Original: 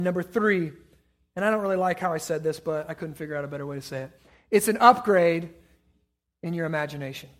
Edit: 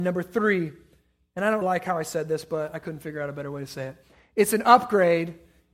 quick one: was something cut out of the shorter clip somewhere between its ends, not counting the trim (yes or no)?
yes